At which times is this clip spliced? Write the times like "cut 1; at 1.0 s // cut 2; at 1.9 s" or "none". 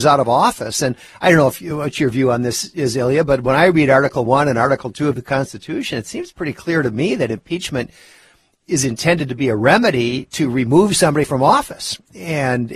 none